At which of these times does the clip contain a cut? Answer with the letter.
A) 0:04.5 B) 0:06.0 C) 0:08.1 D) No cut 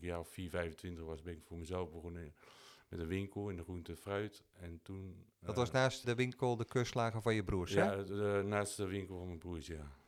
B